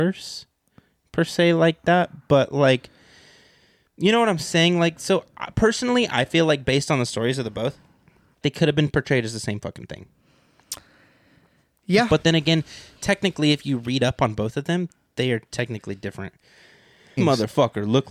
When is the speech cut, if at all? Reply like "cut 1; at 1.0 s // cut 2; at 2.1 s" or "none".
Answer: cut 1; at 8.4 s // cut 2; at 17.2 s